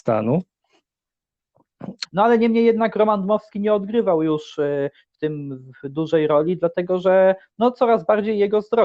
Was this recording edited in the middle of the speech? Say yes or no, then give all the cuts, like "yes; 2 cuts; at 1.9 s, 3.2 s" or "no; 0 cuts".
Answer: yes; 1 cut; at 2.0 s